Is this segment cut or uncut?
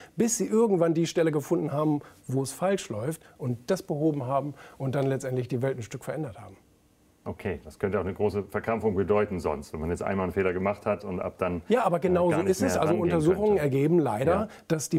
uncut